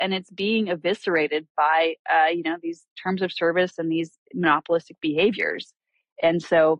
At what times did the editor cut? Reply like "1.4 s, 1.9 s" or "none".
none